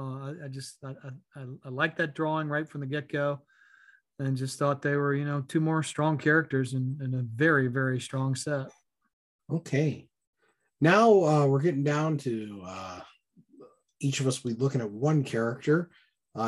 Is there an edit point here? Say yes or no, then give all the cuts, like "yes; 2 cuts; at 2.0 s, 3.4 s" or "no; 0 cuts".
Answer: no; 0 cuts